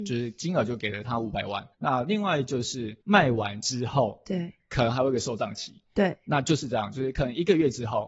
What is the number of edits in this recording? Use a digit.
2